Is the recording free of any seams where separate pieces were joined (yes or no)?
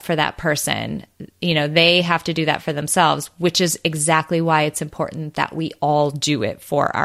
yes